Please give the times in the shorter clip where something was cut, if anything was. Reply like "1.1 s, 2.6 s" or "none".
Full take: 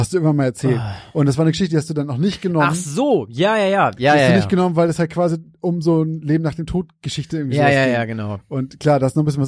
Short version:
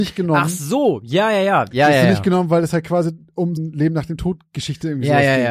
3.6 s

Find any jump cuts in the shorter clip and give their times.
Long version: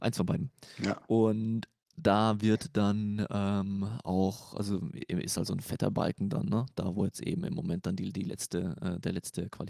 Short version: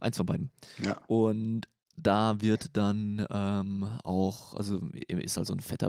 none

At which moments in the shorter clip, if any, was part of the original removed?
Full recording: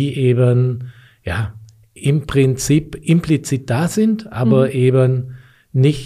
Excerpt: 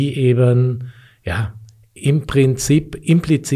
none

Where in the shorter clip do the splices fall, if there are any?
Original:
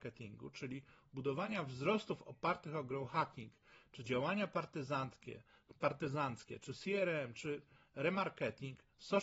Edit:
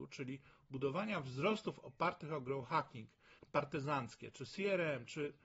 3.4 s

